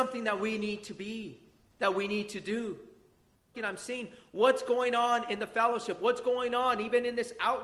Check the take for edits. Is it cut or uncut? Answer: cut